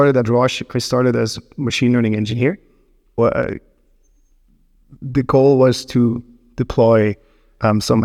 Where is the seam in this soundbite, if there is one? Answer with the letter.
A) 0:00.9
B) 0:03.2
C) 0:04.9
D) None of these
B